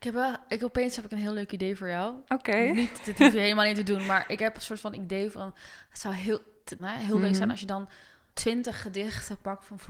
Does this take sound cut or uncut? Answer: cut